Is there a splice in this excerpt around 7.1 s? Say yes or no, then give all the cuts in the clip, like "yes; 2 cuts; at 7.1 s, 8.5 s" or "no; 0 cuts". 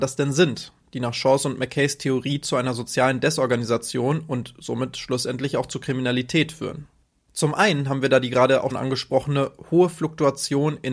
no; 1 cut; at 8.7 s